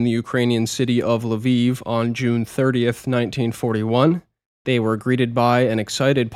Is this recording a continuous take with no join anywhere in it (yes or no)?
yes